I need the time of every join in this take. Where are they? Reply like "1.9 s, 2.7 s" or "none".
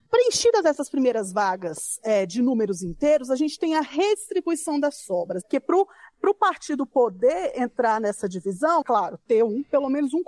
5.4 s, 8.8 s